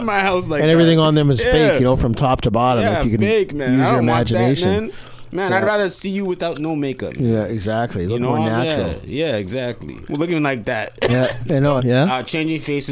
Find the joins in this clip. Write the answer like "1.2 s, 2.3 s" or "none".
10.1 s, 11.8 s